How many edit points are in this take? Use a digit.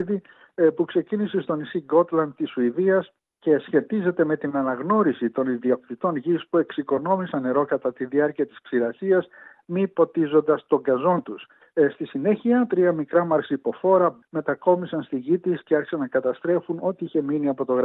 2